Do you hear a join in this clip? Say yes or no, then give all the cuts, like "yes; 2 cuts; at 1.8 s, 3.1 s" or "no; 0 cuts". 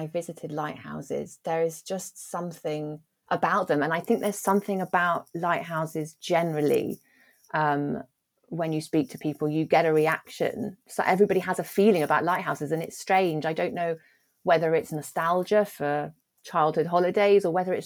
no; 0 cuts